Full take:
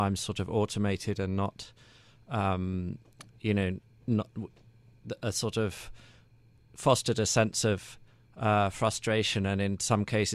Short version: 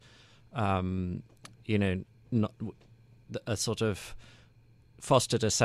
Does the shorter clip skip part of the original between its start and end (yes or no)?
no